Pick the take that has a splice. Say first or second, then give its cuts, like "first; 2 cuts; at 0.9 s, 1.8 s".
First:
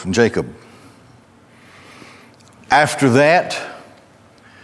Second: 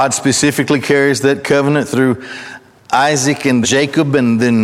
second; 1 cut; at 3.6 s